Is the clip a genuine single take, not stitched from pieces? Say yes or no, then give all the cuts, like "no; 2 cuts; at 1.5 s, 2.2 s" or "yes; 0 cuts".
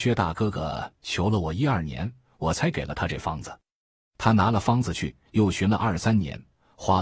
yes; 0 cuts